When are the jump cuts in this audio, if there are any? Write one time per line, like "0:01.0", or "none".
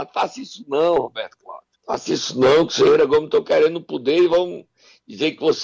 0:01.8